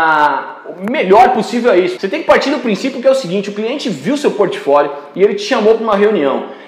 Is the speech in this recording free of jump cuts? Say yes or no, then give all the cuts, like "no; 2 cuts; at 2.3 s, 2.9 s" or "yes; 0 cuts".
no; 1 cut; at 2.0 s